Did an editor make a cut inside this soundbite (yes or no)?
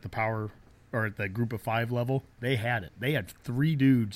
no